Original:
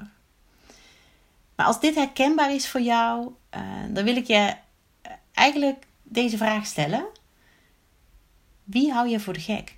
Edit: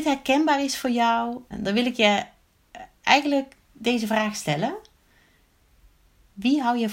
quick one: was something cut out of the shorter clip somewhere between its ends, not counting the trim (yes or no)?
yes